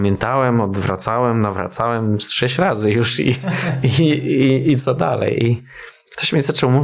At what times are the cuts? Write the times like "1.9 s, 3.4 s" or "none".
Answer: none